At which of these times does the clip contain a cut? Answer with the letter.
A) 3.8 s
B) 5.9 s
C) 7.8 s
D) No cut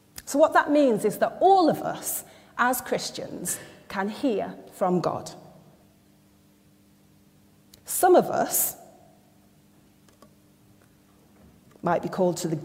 D